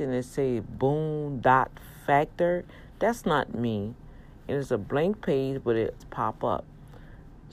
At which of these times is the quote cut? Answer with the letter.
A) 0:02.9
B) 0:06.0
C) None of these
B